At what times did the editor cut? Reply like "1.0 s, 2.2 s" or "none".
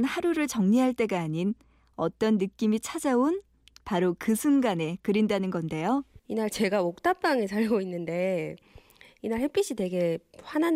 6.2 s